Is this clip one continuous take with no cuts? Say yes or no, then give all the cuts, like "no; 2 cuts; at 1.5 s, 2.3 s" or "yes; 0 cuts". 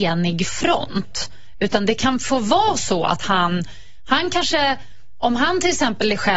yes; 0 cuts